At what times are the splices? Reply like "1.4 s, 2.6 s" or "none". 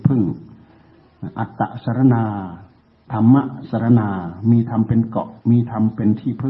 5.4 s